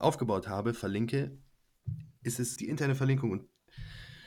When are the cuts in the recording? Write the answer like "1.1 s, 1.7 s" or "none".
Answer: 2.6 s

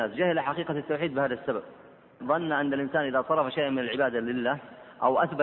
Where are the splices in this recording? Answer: 2.2 s

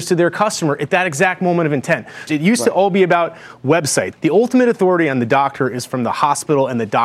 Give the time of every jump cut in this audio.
2.3 s, 4.1 s

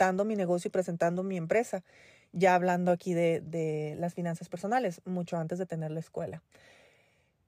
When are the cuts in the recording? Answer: none

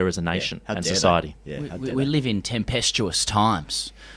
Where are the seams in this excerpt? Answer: none

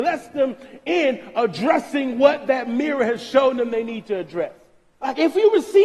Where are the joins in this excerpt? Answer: 4.9 s

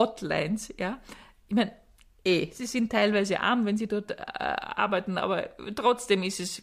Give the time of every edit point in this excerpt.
none

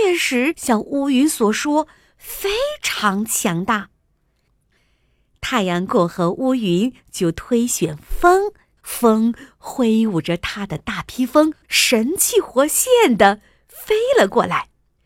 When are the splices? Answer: 5.9 s, 8.8 s

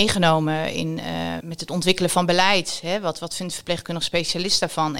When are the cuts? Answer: 1.4 s

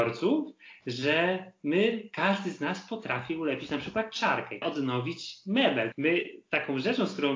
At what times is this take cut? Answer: 4.6 s, 5.9 s

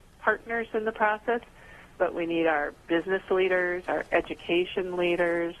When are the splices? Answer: 3.8 s

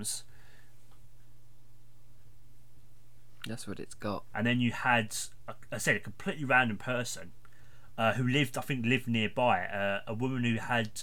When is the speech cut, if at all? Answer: 4.3 s

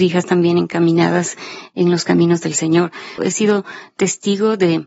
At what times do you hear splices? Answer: 3.2 s

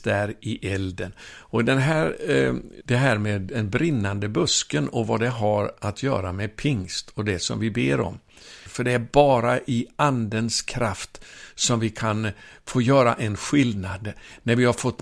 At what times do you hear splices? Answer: 2.8 s, 8.7 s

